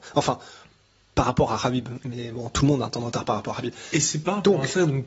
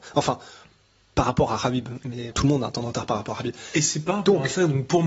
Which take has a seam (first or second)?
second